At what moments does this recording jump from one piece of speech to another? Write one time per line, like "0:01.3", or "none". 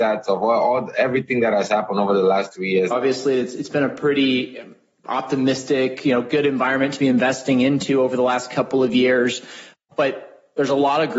0:02.9